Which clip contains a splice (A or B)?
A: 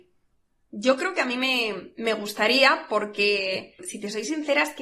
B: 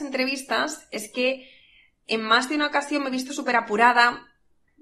A